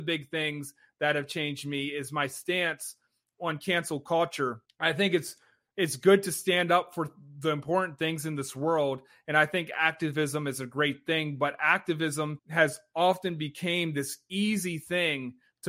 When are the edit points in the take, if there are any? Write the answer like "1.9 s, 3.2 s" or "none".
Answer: none